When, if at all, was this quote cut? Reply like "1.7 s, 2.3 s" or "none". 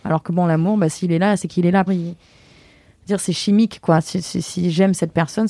1.9 s

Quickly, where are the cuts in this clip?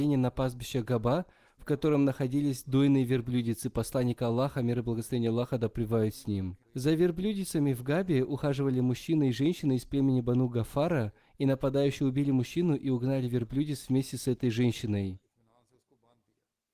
6.6 s

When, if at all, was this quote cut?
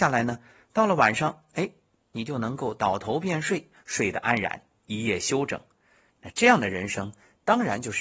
2.0 s, 3.8 s

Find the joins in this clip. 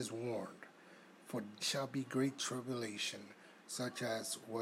1.6 s

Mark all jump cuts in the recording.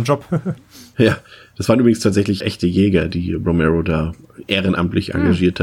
2.4 s

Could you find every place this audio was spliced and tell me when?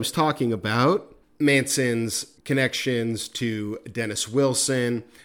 1.2 s

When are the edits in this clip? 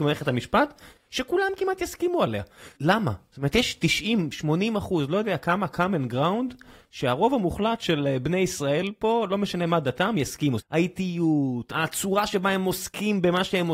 2.8 s, 10.6 s, 11.7 s

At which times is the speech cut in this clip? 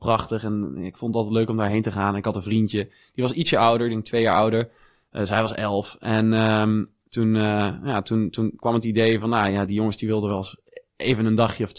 none

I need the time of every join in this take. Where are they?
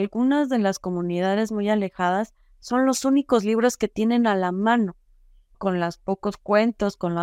5.5 s

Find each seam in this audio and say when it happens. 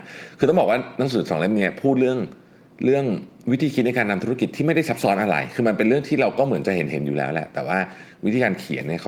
none

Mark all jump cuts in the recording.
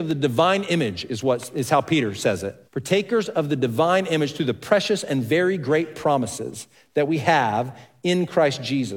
2.7 s

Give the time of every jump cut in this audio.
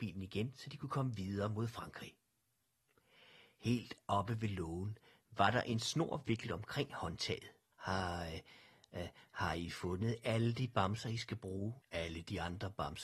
7.7 s, 11.8 s

